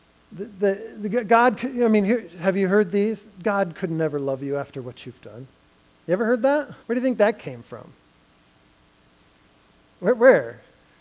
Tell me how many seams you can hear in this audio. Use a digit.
1